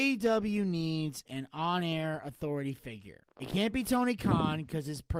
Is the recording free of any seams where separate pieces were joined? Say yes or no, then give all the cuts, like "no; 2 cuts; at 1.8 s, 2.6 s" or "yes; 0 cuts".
yes; 0 cuts